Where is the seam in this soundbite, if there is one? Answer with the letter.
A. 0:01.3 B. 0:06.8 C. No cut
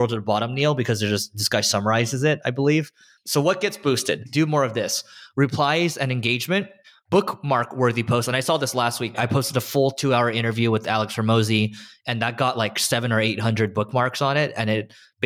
C